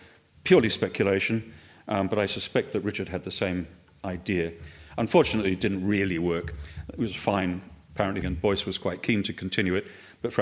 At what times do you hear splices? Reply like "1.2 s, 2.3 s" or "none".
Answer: 8.2 s